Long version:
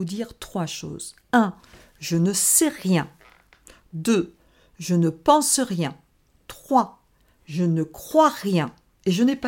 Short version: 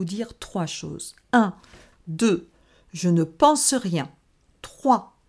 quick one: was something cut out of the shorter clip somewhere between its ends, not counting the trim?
yes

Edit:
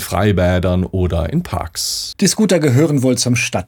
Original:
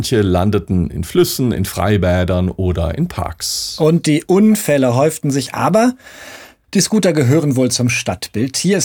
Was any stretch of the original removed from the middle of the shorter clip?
yes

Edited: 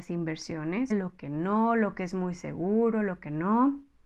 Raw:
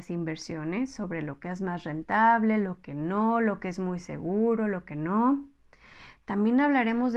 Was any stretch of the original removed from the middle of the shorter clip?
yes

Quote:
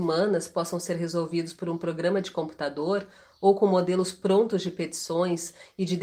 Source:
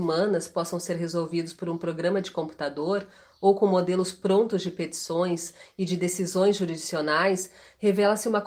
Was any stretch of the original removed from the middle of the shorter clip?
no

